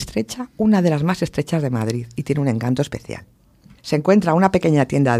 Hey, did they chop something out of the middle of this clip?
yes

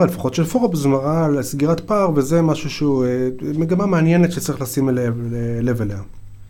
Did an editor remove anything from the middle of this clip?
no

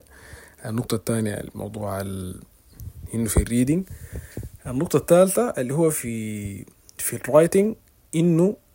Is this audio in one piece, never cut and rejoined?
yes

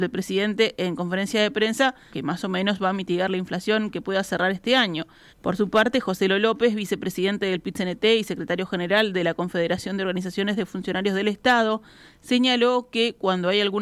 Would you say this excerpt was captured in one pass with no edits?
no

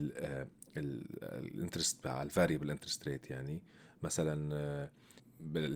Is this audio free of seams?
yes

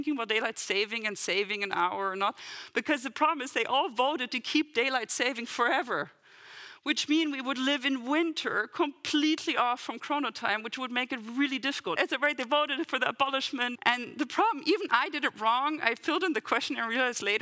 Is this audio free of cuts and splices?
no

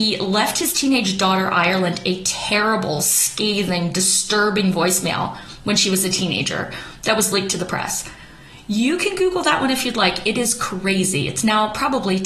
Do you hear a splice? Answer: no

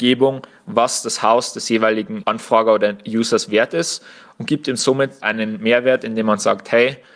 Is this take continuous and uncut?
yes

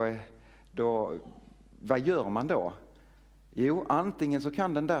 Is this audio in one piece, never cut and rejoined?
yes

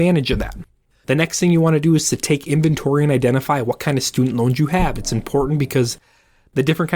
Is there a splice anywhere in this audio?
yes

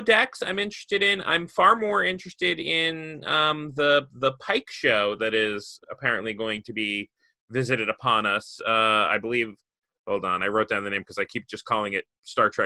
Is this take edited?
yes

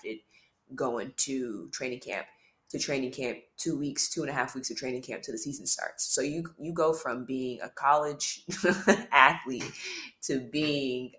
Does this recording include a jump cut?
no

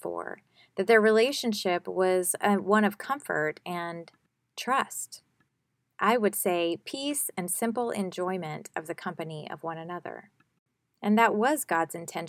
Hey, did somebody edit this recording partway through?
no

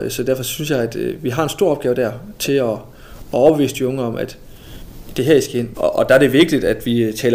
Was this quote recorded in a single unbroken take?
no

